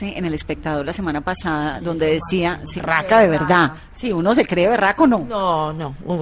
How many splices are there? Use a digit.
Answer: 1